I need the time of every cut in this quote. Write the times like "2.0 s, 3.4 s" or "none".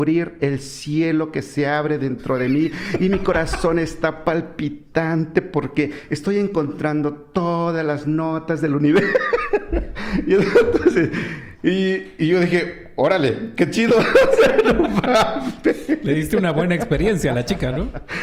none